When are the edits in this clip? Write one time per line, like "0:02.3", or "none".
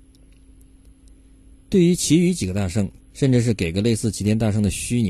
0:03.0